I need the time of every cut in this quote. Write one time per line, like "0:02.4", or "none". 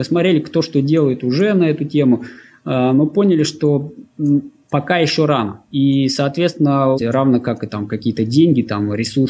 0:05.6
0:07.0